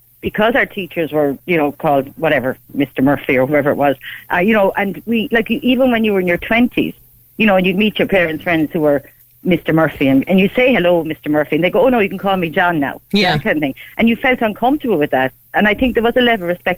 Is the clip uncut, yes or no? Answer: yes